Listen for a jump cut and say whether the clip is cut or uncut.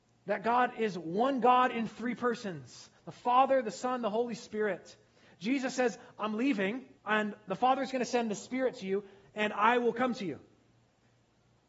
cut